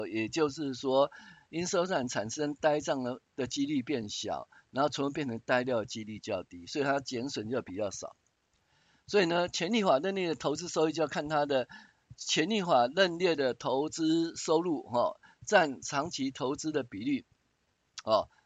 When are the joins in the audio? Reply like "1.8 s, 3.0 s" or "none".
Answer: 9.0 s